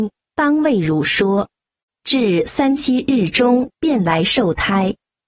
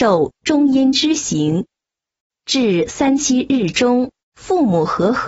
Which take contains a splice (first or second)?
first